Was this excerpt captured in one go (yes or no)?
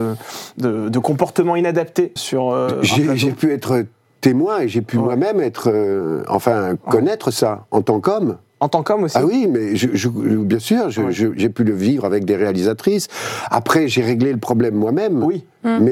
no